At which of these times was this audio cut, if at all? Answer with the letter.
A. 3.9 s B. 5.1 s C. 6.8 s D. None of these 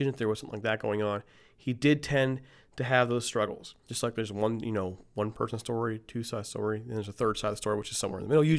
A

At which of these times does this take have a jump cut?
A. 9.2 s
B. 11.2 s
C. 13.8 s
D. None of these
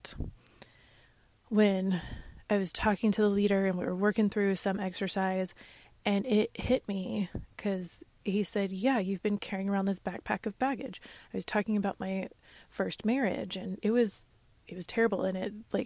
C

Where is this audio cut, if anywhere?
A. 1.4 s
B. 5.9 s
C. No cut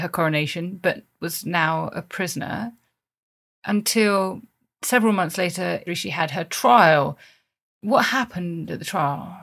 B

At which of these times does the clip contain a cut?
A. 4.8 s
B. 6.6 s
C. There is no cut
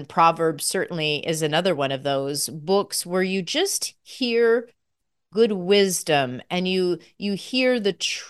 C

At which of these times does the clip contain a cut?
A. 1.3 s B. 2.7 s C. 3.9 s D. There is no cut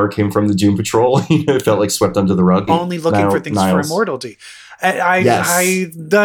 B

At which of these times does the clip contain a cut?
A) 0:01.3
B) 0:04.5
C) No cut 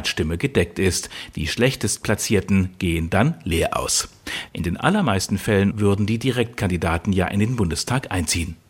B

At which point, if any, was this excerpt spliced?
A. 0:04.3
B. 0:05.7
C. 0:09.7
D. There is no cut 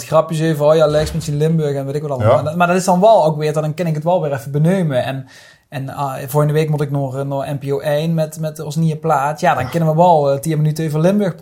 D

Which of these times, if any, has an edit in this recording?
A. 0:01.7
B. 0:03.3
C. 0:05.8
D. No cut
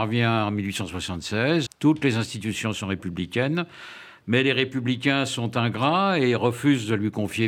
A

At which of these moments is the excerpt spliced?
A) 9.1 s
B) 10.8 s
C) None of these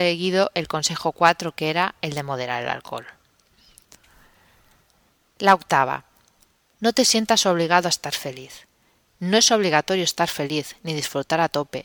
A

